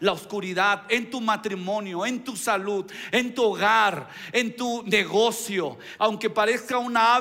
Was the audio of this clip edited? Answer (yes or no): yes